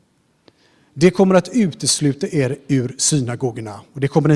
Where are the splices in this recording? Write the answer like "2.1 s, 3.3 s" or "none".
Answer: none